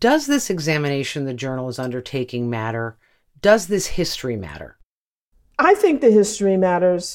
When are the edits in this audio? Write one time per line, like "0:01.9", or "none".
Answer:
none

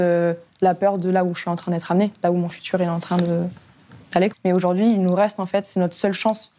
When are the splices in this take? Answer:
0:04.3

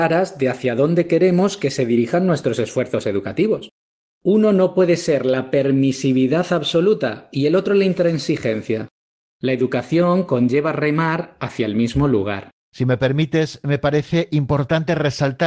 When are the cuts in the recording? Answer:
0:09.3
0:12.7

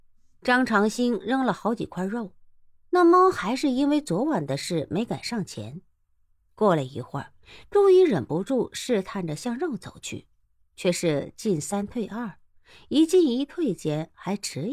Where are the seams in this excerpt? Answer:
none

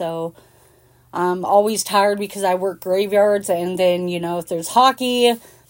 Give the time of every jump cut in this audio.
none

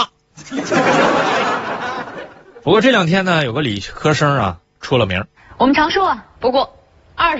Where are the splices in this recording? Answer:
0:06.3

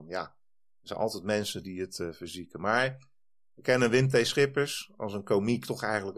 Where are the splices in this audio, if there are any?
none

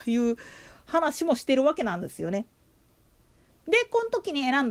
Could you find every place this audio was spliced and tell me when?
0:03.5

